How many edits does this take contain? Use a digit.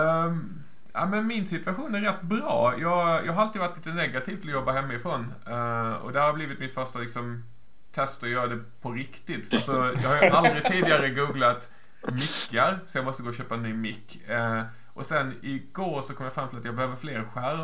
1